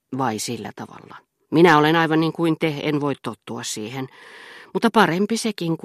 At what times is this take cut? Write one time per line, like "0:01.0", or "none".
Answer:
0:01.5